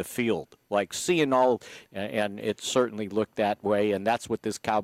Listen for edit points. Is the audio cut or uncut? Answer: cut